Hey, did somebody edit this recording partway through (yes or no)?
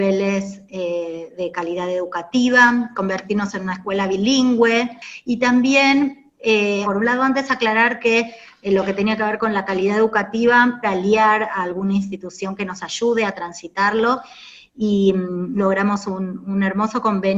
yes